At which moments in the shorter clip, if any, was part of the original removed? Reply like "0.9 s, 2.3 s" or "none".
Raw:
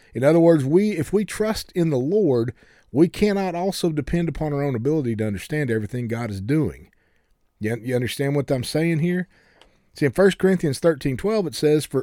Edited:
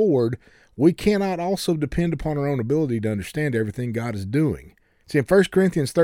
5.0 s